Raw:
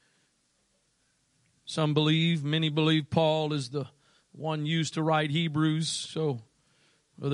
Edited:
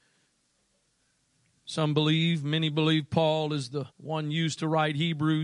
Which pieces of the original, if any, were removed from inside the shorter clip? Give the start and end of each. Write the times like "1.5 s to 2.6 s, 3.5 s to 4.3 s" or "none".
3.9 s to 4.3 s